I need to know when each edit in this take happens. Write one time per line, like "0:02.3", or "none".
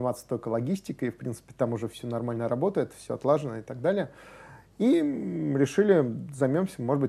none

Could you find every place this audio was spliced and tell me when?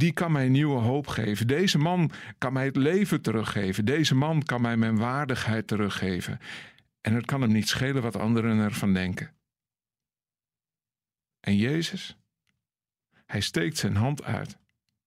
none

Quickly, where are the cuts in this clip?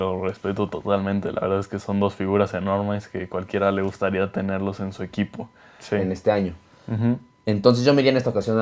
0:05.8

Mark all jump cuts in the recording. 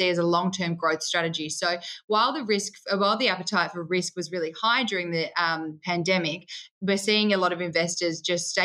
none

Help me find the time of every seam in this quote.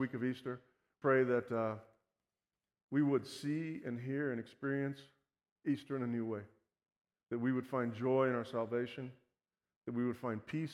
0:01.0
0:07.2

